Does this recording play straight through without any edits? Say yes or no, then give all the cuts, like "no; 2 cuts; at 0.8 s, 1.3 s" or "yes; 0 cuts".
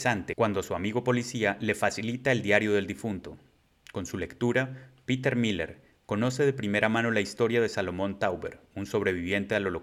yes; 0 cuts